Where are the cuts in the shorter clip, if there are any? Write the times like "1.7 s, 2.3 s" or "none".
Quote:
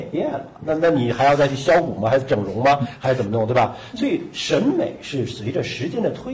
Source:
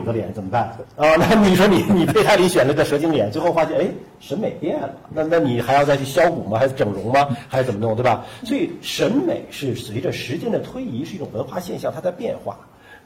none